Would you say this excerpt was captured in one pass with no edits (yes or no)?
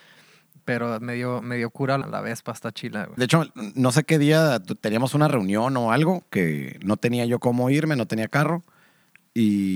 no